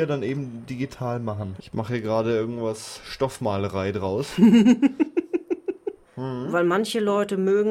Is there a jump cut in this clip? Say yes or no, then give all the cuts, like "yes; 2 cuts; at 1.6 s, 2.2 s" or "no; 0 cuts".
yes; 2 cuts; at 1.6 s, 6.0 s